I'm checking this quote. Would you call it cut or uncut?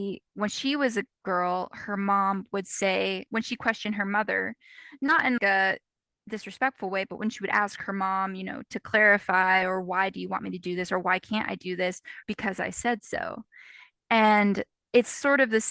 cut